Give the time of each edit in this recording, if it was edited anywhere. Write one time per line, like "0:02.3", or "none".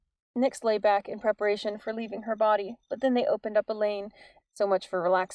0:04.4

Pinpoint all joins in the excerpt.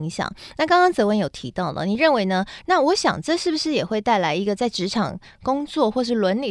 0:02.6

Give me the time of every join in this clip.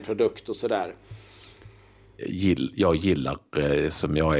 0:02.2

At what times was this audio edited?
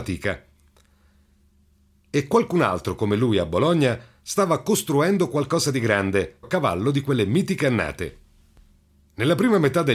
0:06.4

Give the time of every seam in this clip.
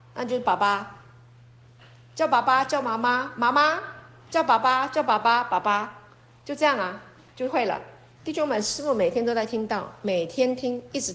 0:08.2

